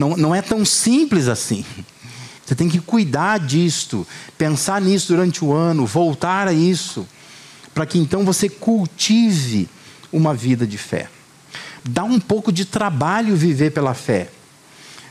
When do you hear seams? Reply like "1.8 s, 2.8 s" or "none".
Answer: 2.4 s, 11.8 s

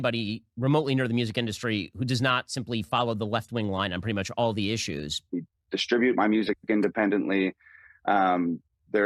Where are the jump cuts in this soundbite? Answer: 5.3 s

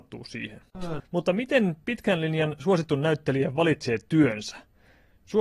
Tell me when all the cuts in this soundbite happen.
1.0 s

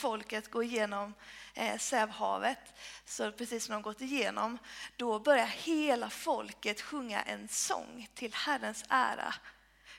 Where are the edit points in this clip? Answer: none

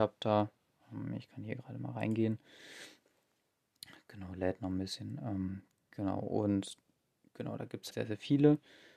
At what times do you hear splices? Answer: 7.9 s

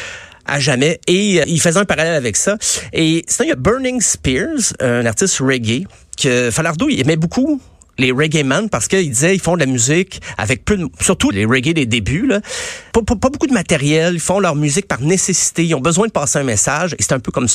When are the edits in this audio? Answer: 1.4 s, 11.3 s, 12.9 s

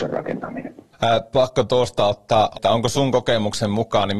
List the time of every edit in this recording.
0.9 s, 2.5 s

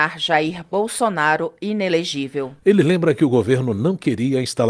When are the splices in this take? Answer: 2.6 s

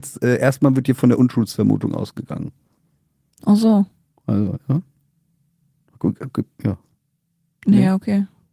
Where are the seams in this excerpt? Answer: none

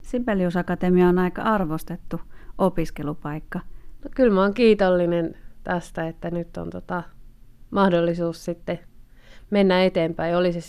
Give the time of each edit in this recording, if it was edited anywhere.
4.0 s

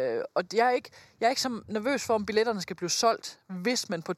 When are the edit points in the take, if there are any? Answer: none

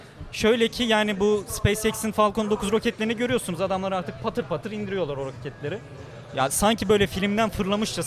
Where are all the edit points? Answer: none

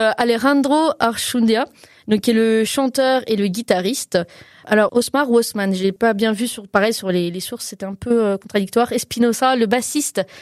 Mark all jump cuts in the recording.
none

